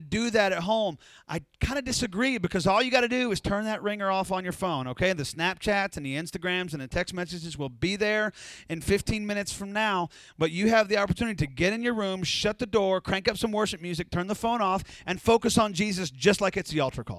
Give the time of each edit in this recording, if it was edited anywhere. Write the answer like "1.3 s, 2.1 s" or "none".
none